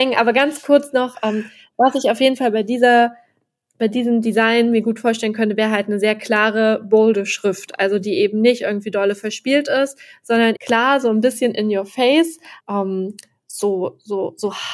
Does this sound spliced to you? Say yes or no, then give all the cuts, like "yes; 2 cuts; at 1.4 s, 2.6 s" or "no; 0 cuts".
yes; 2 cuts; at 10.6 s, 12.6 s